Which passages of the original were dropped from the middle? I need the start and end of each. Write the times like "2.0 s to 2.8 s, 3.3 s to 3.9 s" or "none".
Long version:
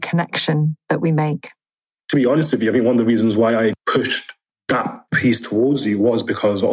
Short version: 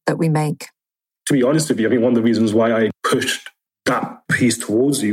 none

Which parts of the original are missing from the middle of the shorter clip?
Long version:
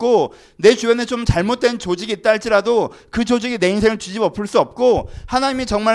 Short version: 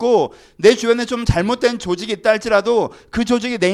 none

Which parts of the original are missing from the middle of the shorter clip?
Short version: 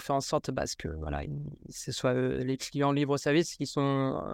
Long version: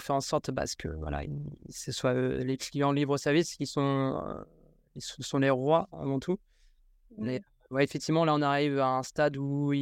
none

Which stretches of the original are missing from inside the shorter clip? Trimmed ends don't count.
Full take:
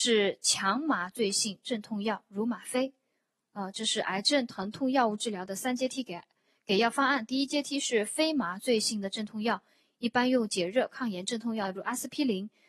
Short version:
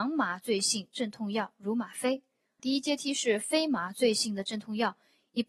3.3 s to 7.3 s

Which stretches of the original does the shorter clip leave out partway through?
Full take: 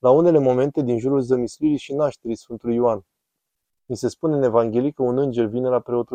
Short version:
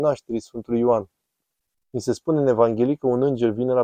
none

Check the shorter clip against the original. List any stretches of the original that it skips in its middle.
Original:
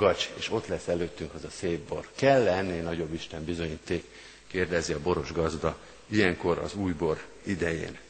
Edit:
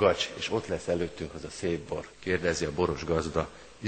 2.1 s to 4.4 s

